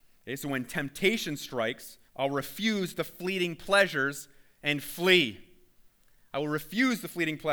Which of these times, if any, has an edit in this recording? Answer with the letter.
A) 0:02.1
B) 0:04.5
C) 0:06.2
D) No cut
A